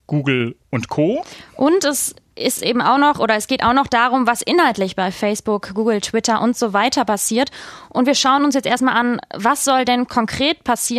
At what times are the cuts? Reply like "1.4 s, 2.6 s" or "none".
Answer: none